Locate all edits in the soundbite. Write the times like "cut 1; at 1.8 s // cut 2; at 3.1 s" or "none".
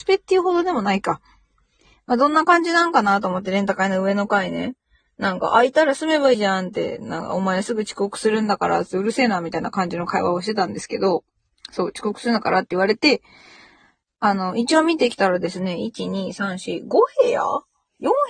cut 1; at 6.3 s